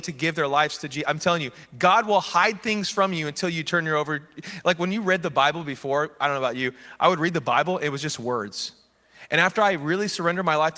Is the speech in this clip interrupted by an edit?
no; 0 cuts

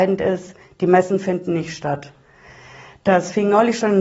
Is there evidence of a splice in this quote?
no; 0 cuts

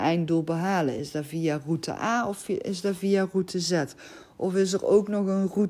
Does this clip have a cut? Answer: no; 0 cuts

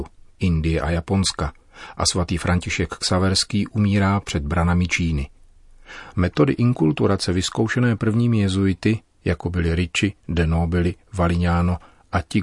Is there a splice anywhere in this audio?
yes; 1 cut; at 6.1 s

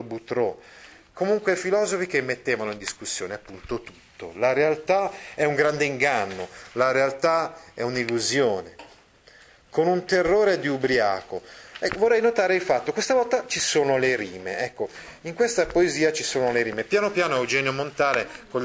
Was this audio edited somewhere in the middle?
no; 0 cuts

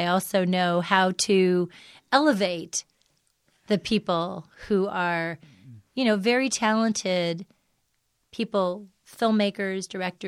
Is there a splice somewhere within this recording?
no; 0 cuts

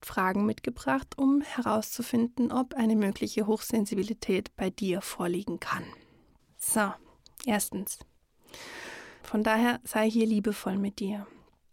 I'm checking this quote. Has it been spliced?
yes; 2 cuts; at 6.4 s, 9.2 s

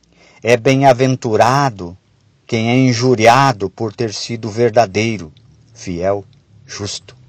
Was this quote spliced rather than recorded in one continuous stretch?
no; 0 cuts

